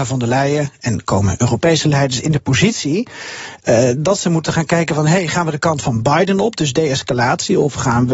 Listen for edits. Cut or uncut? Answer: uncut